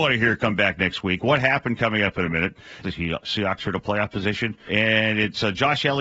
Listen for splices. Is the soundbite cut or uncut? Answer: cut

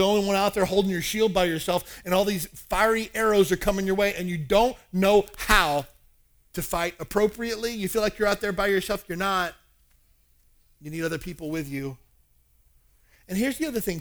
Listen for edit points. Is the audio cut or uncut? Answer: uncut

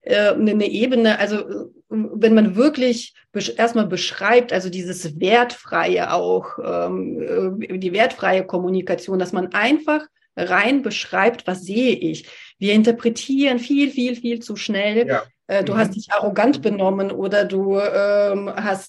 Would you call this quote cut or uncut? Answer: cut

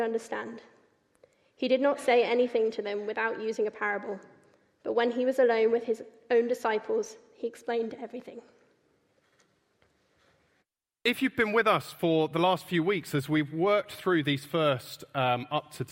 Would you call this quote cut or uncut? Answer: uncut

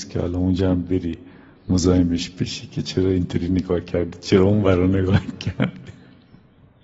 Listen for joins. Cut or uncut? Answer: uncut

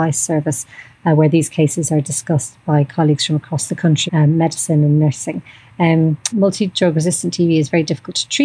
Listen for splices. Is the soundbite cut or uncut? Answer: cut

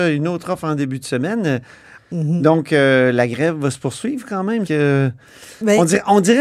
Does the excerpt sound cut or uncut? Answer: cut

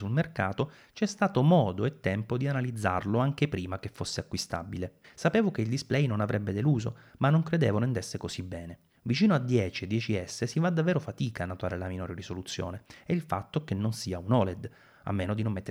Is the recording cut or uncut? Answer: cut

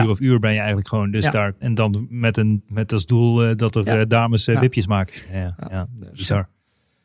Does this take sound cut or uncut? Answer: cut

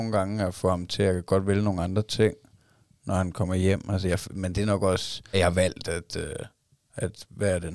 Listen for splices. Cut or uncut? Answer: cut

